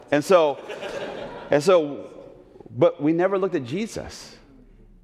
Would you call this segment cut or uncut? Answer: uncut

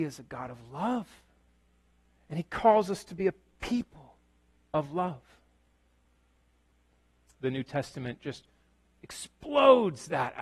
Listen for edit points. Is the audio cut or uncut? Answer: uncut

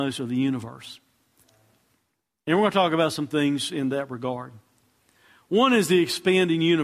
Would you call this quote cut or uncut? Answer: uncut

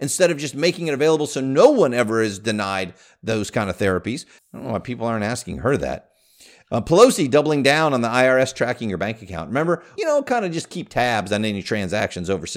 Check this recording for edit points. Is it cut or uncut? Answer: cut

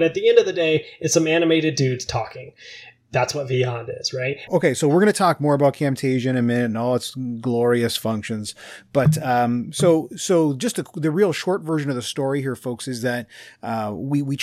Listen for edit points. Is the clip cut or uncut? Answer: cut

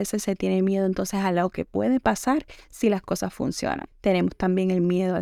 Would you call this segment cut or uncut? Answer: cut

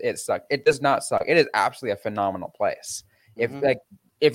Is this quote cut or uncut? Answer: uncut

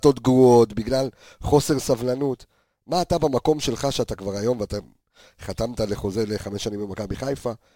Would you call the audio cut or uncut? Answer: uncut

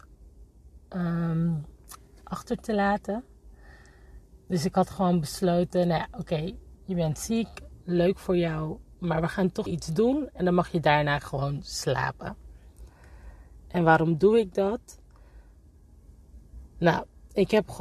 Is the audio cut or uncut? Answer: cut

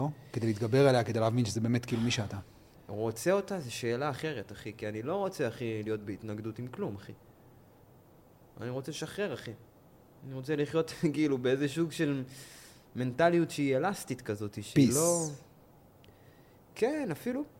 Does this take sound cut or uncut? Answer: uncut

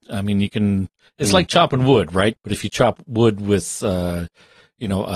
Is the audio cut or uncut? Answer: cut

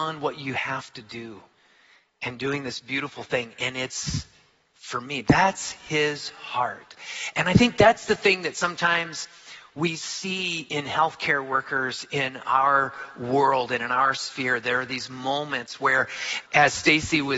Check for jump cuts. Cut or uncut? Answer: cut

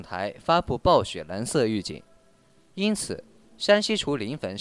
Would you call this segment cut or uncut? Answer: cut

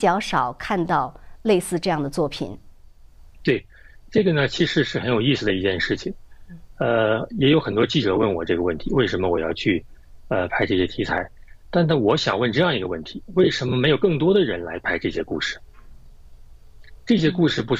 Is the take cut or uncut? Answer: uncut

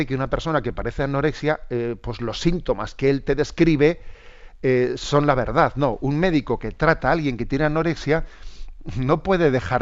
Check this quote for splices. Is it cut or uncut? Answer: uncut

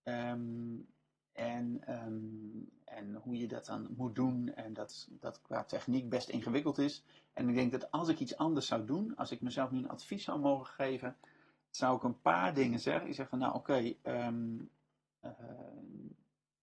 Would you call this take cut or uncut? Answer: uncut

